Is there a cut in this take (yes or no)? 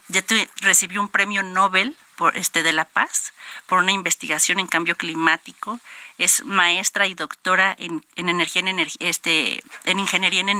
no